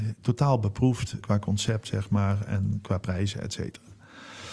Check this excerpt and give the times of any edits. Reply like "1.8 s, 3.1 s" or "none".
1.2 s